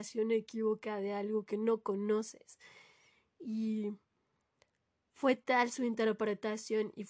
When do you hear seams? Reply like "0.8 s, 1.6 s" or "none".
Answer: none